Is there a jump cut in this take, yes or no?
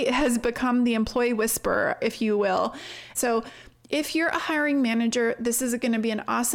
yes